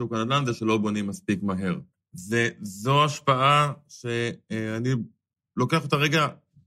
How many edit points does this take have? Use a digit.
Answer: 1